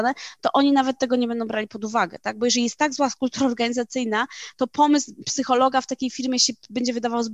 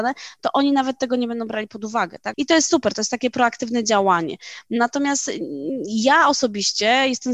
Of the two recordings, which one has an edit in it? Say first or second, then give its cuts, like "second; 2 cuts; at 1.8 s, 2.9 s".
second; 1 cut; at 2.3 s